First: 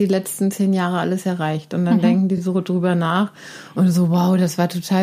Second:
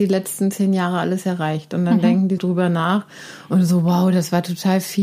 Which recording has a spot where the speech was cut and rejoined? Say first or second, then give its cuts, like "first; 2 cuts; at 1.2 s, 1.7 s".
second; 1 cut; at 2.4 s